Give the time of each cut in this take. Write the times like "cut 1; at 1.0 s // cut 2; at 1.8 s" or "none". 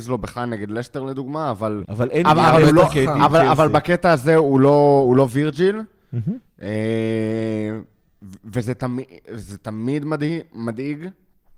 cut 1; at 1.8 s